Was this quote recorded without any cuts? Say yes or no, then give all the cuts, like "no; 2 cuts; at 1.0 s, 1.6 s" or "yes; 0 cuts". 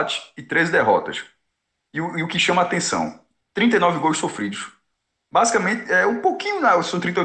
yes; 0 cuts